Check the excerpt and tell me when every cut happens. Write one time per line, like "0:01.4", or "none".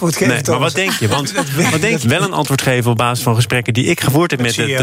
0:02.0